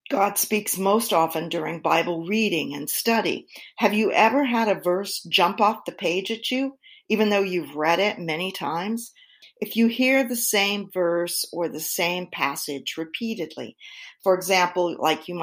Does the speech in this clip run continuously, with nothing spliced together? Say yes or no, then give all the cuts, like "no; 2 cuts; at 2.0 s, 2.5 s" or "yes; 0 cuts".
no; 1 cut; at 9.4 s